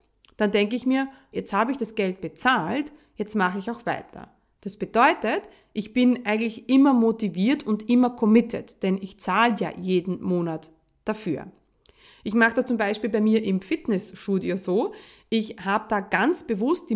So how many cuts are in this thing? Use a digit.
1